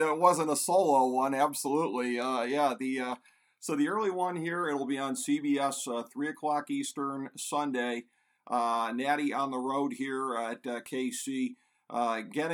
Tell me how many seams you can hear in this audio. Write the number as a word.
zero